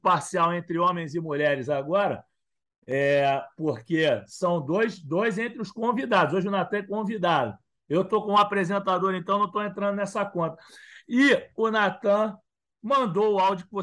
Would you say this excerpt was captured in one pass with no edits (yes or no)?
yes